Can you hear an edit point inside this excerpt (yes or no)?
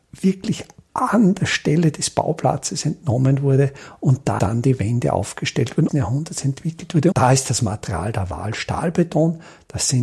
yes